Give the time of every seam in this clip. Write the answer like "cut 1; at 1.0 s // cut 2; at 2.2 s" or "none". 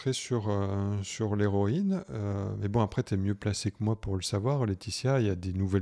none